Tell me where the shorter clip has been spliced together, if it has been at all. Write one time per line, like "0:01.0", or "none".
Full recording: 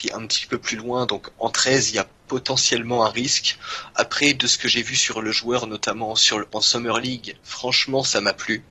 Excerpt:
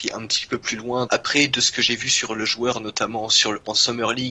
0:01.1